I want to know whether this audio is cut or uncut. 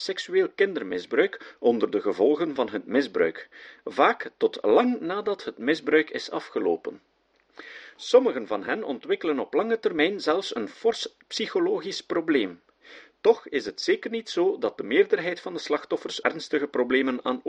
cut